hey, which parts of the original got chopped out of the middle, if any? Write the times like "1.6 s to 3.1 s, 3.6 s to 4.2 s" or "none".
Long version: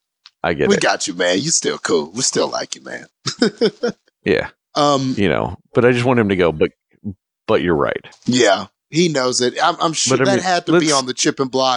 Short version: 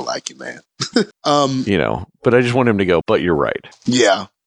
3.6 s to 4.6 s, 6.5 s to 7.4 s